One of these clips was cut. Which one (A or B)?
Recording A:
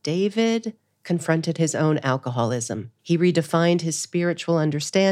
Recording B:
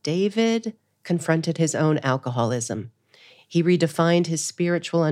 A